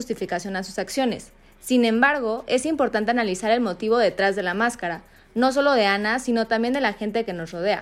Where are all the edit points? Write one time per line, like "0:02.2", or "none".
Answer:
none